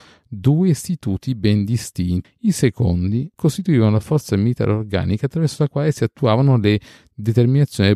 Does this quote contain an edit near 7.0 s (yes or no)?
no